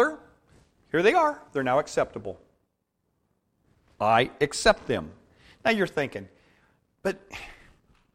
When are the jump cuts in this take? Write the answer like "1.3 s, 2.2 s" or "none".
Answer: none